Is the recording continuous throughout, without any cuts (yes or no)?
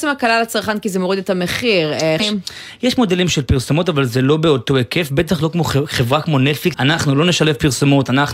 no